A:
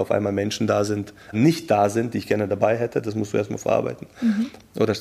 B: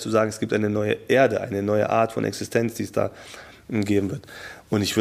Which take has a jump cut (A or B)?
A